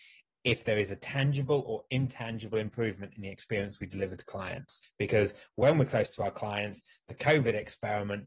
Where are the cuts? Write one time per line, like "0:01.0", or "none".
0:04.8